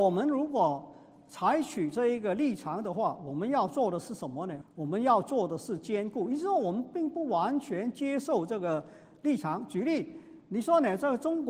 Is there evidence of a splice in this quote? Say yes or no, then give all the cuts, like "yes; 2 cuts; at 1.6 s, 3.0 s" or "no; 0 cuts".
yes; 1 cut; at 4.6 s